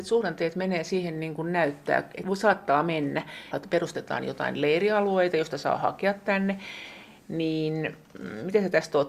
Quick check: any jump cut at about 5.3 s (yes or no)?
no